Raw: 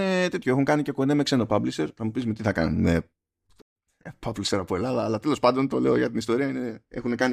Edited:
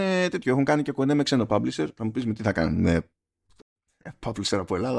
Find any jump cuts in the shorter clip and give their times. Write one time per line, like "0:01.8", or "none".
none